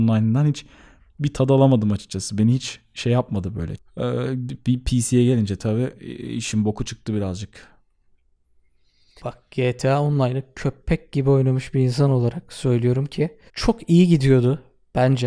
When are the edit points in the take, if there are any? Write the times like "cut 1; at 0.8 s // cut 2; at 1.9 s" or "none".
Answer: cut 1; at 3.8 s // cut 2; at 9.2 s // cut 3; at 13.5 s